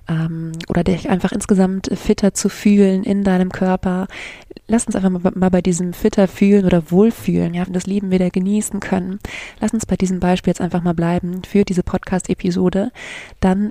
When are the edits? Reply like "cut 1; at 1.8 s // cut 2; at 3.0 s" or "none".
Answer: cut 1; at 7.7 s

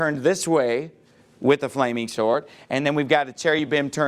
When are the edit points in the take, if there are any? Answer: none

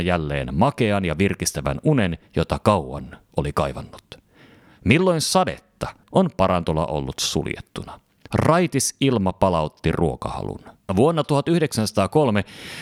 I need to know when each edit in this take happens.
cut 1; at 6.0 s // cut 2; at 8.3 s // cut 3; at 10.9 s

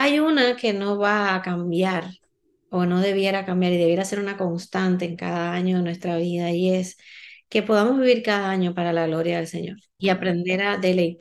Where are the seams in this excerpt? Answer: cut 1; at 10.0 s

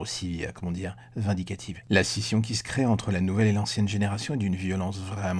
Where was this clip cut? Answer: cut 1; at 1.8 s

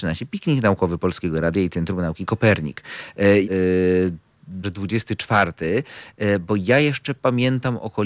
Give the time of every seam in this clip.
cut 1; at 3.4 s // cut 2; at 4.6 s

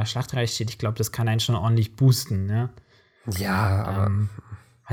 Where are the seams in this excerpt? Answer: none

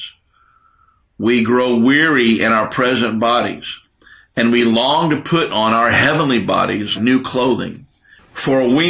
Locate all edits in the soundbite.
cut 1; at 6.9 s

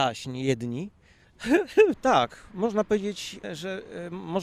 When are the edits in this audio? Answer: cut 1; at 1.9 s

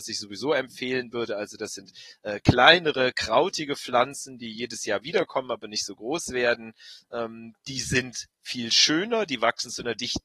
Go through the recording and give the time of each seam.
none

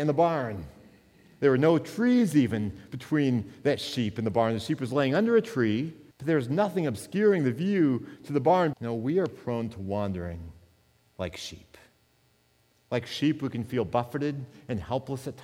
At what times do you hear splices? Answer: cut 1; at 6.1 s // cut 2; at 8.7 s

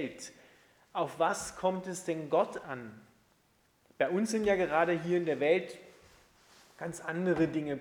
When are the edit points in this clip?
cut 1; at 2.6 s

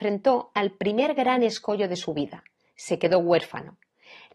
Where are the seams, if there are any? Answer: none

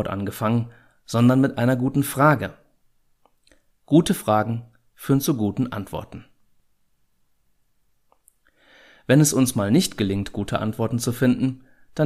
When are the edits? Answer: cut 1; at 3.7 s

